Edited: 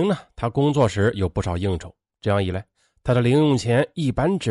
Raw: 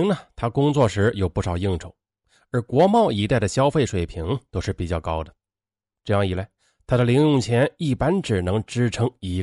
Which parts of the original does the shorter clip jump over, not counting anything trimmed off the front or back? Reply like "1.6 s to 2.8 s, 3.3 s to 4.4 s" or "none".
2.1 s to 5.9 s